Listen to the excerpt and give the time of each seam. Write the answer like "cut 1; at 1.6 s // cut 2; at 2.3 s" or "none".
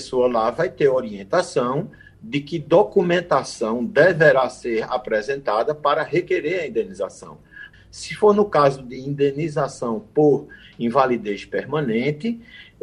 cut 1; at 7.7 s